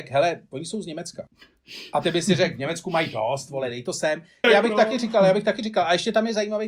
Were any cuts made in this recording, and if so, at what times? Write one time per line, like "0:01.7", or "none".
0:04.4